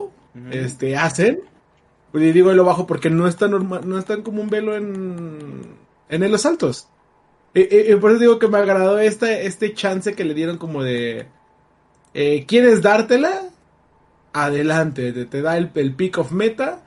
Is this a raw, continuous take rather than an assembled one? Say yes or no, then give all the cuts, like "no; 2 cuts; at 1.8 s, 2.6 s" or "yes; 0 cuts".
yes; 0 cuts